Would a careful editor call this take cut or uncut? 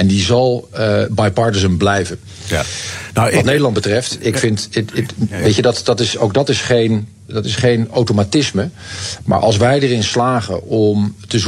uncut